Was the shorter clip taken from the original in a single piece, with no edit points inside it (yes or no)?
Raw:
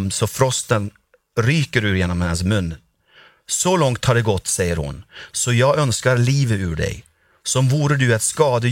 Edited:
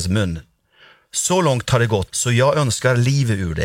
no